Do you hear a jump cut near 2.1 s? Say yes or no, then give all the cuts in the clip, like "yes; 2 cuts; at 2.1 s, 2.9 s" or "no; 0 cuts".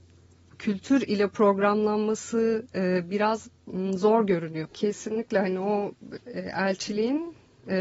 no; 2 cuts; at 4.7 s, 6.2 s